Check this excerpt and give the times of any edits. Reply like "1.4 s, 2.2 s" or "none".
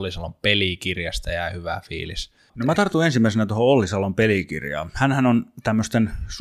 2.5 s

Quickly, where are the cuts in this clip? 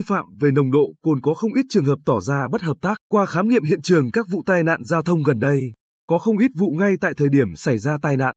3.0 s

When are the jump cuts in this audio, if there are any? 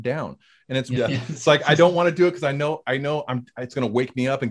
1.0 s

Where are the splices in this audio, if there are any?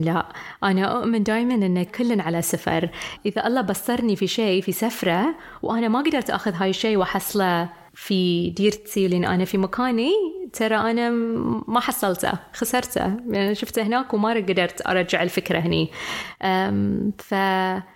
1.9 s

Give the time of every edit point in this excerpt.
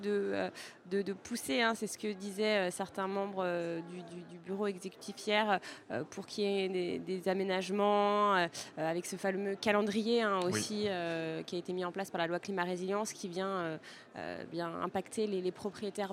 none

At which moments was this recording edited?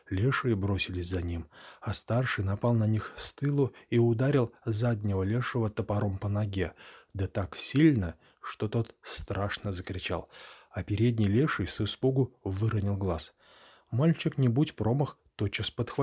none

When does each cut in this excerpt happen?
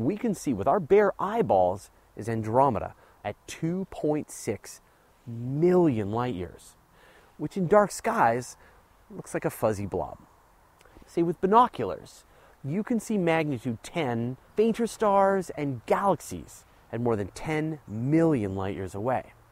11.0 s, 14.5 s

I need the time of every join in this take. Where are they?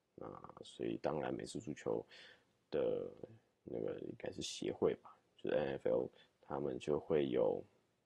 none

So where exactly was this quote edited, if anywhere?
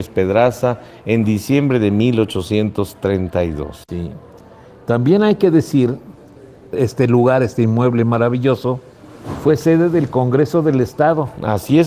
none

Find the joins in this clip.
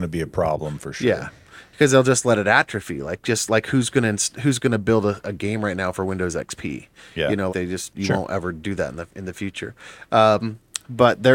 7.5 s

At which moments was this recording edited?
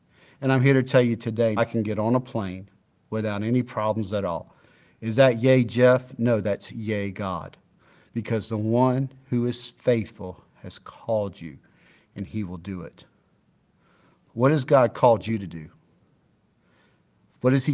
1.6 s

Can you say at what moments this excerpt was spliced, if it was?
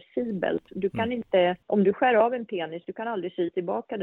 1.6 s

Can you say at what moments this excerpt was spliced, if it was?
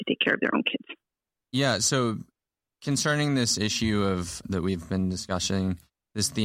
1.4 s, 4.4 s

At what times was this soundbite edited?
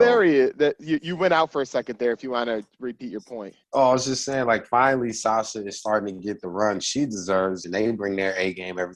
3.6 s, 7.6 s

